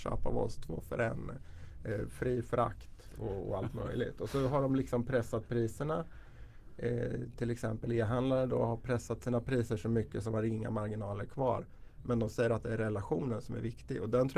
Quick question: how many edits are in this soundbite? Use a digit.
0